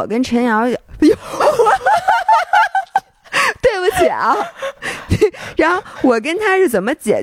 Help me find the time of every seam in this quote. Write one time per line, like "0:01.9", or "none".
none